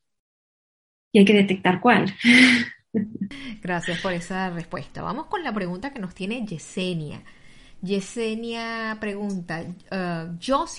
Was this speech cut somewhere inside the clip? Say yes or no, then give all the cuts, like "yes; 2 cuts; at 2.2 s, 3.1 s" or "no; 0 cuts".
no; 0 cuts